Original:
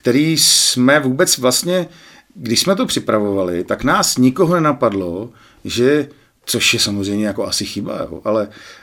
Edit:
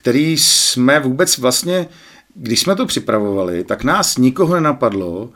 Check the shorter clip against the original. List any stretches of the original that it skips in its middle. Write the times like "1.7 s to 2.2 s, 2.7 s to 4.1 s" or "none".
none